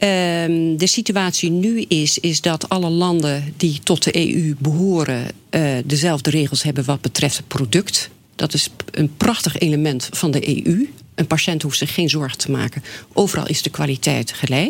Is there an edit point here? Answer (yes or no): no